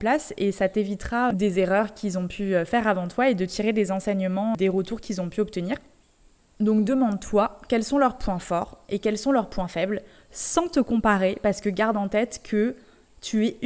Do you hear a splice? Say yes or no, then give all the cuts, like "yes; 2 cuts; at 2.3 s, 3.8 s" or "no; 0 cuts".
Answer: no; 0 cuts